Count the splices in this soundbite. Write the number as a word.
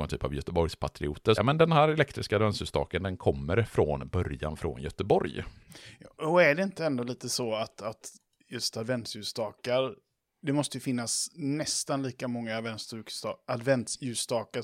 one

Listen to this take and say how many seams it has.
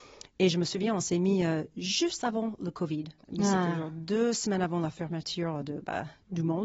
zero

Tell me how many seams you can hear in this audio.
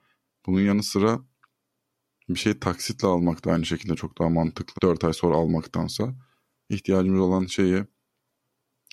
two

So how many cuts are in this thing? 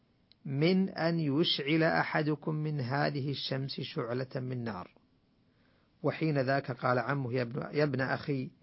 zero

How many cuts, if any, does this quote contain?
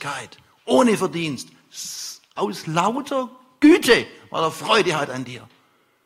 zero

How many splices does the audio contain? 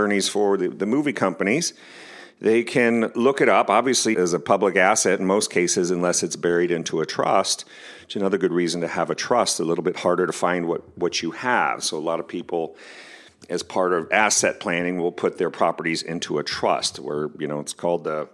one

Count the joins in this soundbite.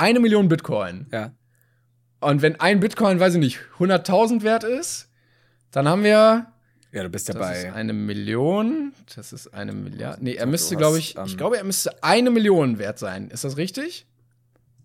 zero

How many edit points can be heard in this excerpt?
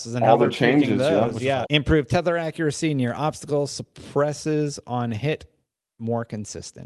one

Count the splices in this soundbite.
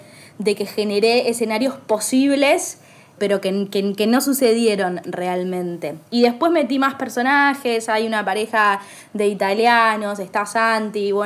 one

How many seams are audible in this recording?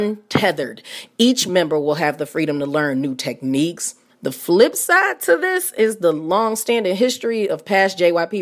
one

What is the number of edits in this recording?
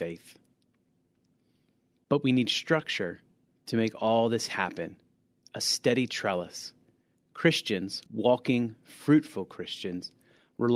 one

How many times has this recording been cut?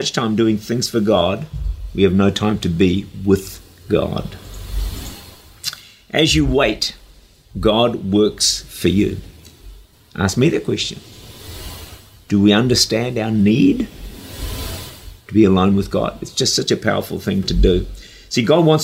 one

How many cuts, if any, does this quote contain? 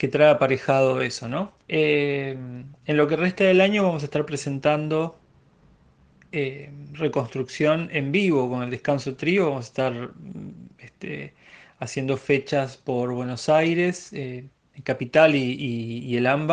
one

